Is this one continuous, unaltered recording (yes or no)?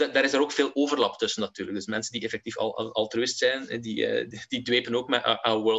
yes